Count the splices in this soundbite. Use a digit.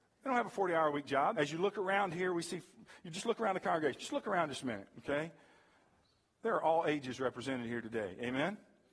1